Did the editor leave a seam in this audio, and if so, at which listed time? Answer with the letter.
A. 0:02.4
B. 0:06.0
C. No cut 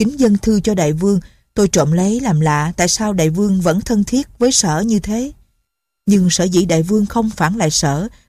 B